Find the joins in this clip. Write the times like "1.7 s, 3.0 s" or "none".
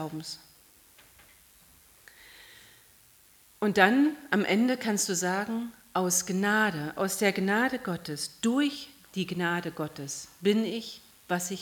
none